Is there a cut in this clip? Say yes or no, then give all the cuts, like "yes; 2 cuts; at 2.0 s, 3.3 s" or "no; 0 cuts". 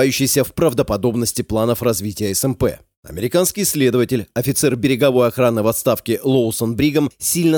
no; 0 cuts